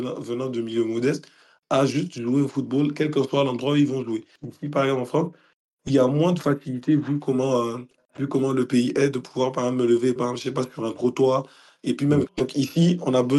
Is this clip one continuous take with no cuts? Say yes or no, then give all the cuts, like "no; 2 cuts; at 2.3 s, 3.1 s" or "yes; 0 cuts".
no; 2 cuts; at 10.2 s, 12.3 s